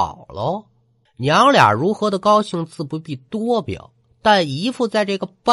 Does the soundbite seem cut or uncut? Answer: cut